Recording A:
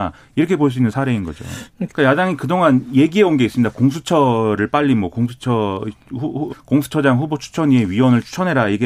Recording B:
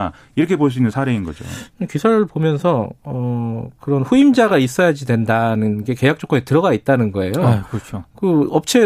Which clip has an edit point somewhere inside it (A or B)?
A